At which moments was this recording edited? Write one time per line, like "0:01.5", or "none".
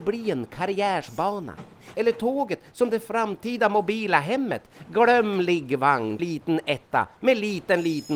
0:01.9
0:06.2